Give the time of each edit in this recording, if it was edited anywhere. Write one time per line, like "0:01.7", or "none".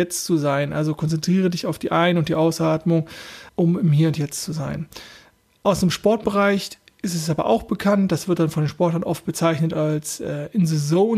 0:03.5